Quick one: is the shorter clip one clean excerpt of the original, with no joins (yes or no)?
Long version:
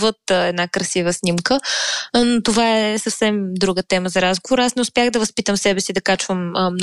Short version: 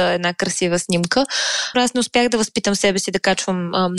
no